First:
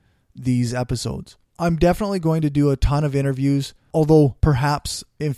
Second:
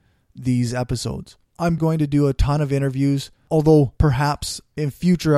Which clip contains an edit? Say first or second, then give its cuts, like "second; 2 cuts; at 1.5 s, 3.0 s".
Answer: second; 1 cut; at 1.8 s